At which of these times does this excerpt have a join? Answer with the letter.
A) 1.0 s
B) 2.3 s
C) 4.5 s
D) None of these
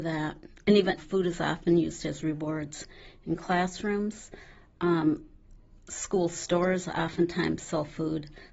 A